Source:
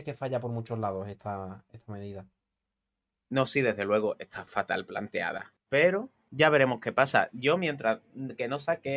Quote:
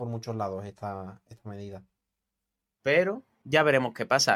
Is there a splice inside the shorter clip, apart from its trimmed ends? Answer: yes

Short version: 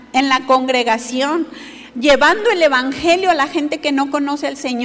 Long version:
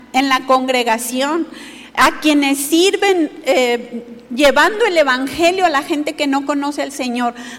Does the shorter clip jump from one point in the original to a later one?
yes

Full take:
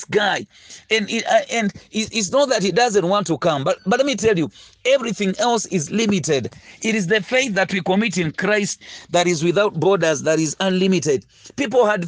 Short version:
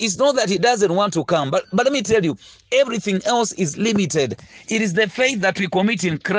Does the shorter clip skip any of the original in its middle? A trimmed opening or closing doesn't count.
no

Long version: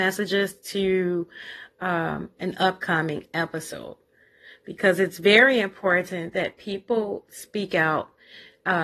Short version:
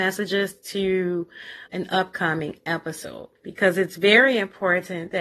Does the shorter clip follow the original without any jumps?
no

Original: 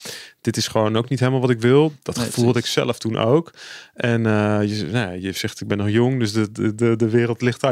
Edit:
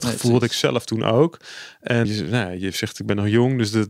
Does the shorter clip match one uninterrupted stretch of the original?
no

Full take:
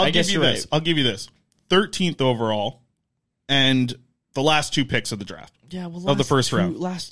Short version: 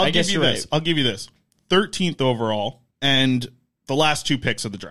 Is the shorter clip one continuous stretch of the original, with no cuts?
no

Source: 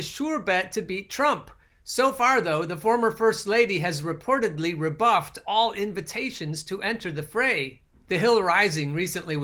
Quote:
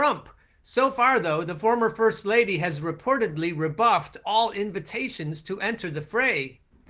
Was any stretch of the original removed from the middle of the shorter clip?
no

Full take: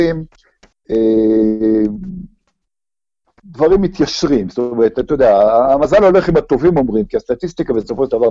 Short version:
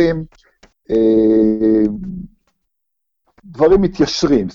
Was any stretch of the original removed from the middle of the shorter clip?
no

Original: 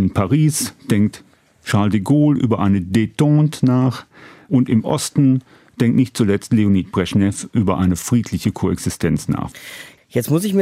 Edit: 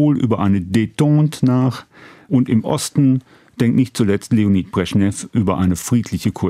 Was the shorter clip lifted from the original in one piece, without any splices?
yes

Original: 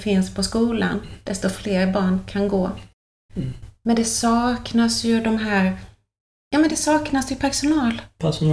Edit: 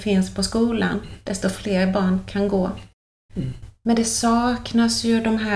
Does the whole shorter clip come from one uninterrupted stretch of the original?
yes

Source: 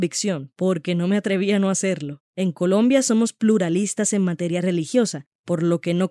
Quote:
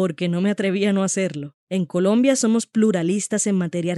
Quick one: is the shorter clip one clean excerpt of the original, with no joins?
yes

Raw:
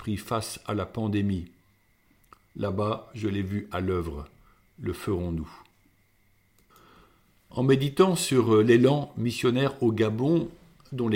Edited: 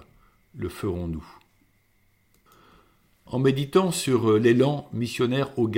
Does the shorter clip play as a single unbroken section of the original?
yes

